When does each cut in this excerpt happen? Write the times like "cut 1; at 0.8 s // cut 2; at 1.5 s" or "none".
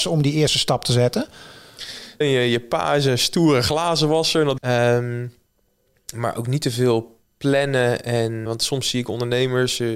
cut 1; at 2.2 s // cut 2; at 4.6 s // cut 3; at 8.5 s